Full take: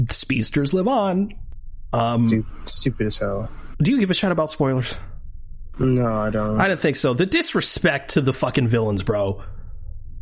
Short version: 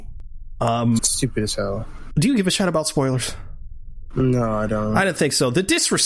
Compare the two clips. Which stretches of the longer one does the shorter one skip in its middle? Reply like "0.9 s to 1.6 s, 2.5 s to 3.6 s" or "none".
2.3 s to 2.6 s